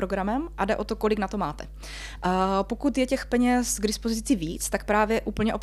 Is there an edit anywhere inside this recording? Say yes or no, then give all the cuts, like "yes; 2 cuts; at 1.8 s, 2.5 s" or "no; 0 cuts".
no; 0 cuts